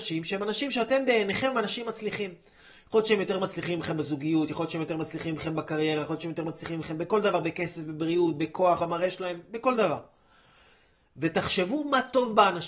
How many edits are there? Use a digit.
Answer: 1